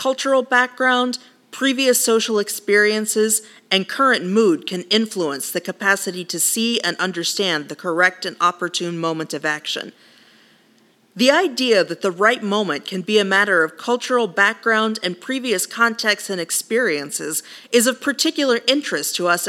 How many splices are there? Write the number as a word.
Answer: zero